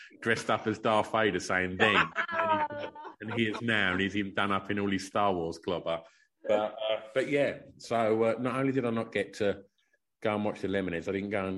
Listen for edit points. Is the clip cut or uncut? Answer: uncut